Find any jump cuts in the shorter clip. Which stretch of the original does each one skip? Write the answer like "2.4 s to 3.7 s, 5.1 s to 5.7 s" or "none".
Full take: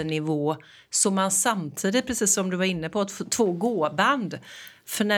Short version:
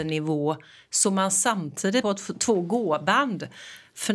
2.0 s to 2.9 s